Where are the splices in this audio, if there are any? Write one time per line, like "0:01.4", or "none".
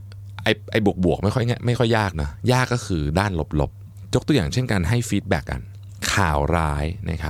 0:05.4